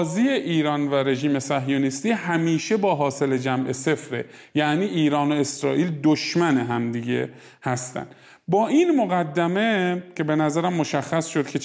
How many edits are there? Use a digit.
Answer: 0